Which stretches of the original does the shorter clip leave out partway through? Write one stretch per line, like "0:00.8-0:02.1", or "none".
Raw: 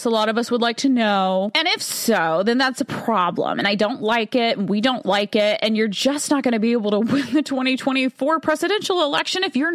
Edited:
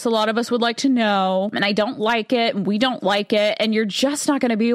0:01.5-0:03.5